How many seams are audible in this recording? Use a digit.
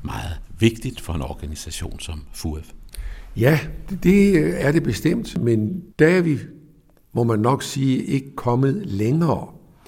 1